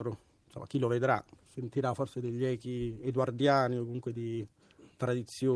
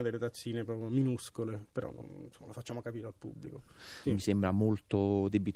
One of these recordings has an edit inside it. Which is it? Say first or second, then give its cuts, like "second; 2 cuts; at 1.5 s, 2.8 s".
second; 1 cut; at 4.0 s